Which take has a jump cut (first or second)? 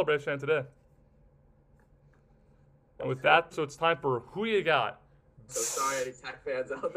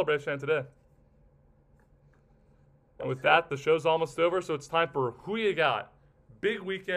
first